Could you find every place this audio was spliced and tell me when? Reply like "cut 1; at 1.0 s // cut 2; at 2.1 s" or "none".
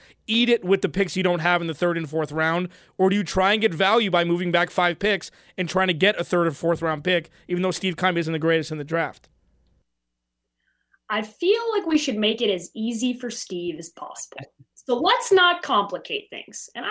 none